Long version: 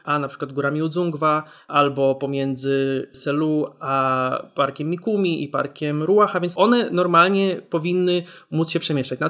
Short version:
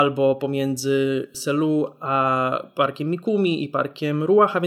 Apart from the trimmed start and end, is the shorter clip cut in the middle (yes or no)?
no